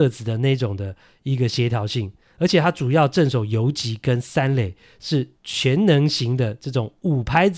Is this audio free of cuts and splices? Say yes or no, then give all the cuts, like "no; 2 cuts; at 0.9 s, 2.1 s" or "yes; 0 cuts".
yes; 0 cuts